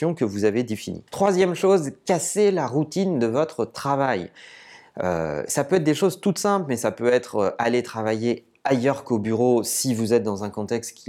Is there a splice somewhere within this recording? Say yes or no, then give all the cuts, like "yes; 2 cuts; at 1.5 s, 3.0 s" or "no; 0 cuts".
no; 0 cuts